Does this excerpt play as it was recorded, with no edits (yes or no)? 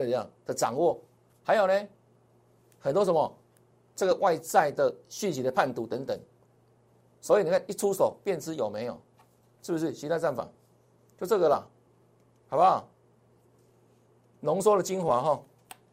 yes